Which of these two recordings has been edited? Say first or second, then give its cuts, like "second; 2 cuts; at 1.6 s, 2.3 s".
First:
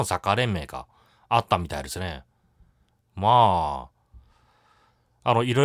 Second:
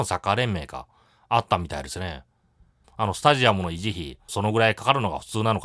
second; 2 cuts; at 2.8 s, 4.3 s